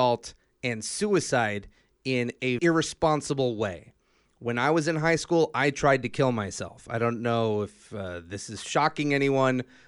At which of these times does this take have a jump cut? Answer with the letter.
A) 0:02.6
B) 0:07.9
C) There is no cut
A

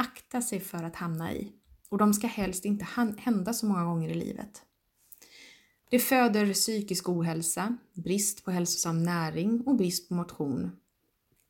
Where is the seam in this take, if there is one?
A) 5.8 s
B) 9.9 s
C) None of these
A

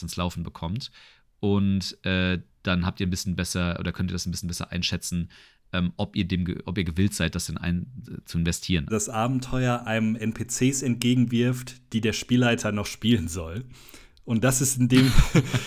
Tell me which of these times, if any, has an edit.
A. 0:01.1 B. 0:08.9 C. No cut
B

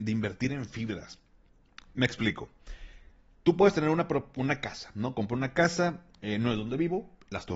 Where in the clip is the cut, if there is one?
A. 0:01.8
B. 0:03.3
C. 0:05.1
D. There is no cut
A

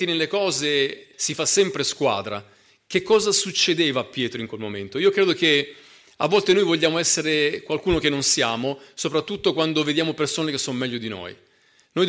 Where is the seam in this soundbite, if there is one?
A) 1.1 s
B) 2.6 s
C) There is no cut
A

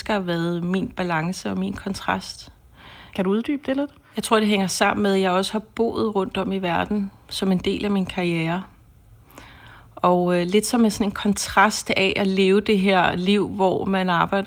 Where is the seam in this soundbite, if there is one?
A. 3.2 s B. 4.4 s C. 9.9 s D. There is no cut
A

